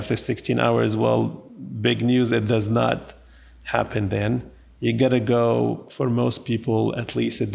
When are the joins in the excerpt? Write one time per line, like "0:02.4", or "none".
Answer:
none